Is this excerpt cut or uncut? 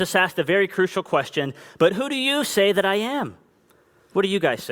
uncut